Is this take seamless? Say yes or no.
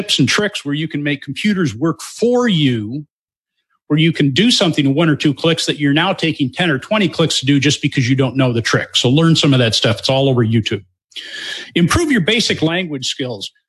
yes